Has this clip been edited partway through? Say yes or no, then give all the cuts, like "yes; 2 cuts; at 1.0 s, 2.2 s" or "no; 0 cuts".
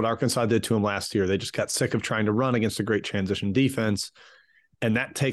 no; 0 cuts